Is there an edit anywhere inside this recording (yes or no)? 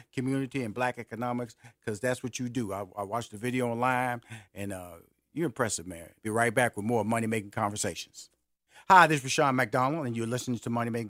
yes